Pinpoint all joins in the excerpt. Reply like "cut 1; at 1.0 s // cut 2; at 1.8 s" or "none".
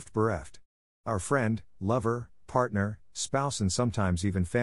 none